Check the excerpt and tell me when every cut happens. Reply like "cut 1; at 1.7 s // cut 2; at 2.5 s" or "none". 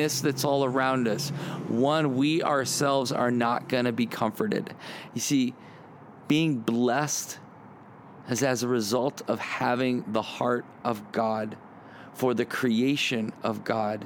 cut 1; at 5.1 s